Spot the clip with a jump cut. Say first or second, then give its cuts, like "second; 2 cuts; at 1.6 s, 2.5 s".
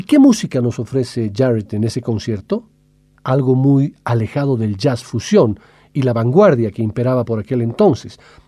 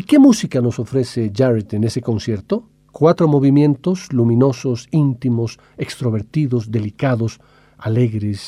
second; 1 cut; at 2.9 s